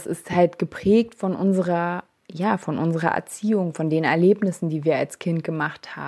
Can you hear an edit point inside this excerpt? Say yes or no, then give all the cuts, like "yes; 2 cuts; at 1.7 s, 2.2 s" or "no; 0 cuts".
no; 0 cuts